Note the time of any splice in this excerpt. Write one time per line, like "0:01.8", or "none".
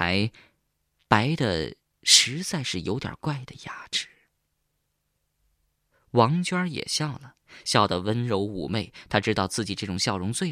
0:03.2